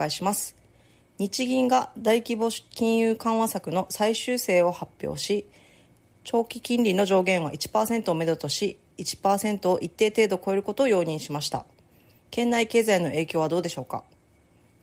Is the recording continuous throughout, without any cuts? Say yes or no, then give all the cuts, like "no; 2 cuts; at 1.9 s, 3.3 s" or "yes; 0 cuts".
yes; 0 cuts